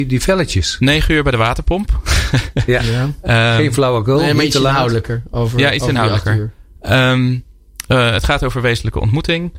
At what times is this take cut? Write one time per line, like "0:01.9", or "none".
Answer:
none